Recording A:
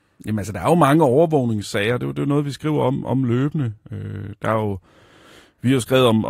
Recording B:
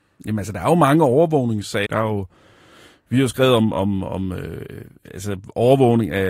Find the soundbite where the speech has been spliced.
B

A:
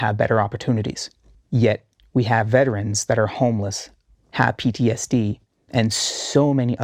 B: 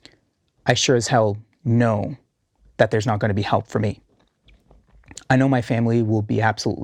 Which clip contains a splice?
A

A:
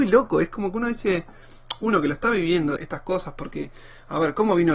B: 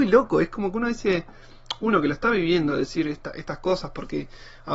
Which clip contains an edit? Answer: A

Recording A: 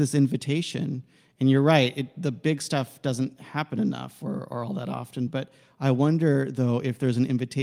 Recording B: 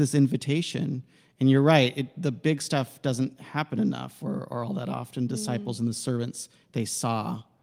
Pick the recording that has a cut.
B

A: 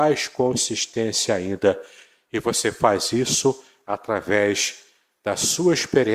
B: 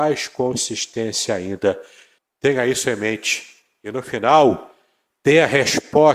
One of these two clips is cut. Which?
B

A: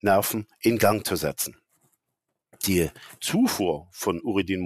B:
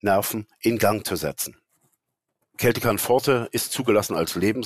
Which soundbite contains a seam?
B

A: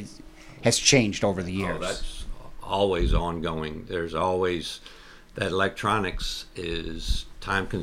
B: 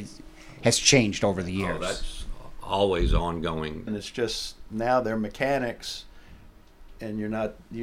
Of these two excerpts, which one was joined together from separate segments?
B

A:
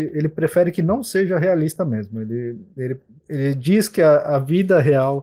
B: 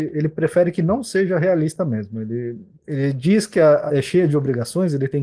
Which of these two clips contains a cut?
B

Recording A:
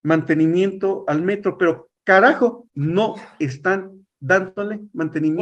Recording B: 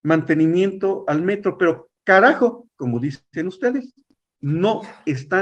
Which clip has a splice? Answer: A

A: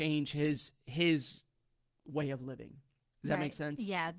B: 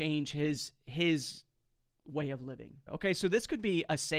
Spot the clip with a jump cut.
B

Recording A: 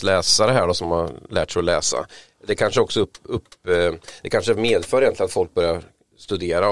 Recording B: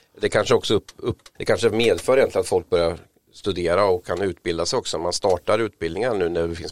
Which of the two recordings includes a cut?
B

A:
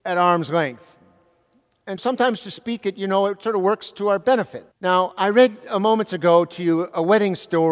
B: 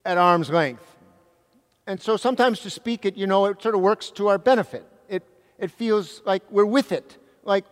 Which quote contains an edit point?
A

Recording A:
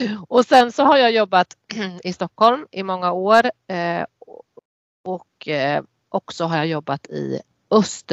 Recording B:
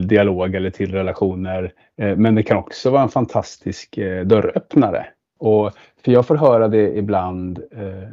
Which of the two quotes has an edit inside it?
B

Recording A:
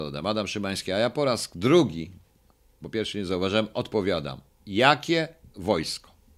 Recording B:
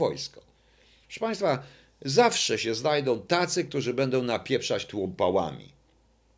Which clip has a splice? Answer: B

